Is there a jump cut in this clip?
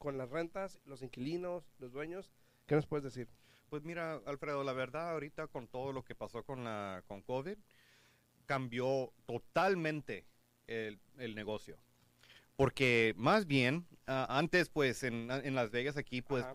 yes; 1 cut; at 14.0 s

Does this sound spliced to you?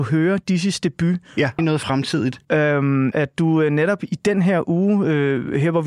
yes; 2 cuts; at 1.6 s, 3.1 s

